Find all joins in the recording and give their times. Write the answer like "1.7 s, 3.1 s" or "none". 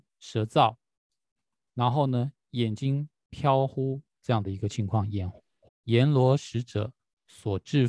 5.7 s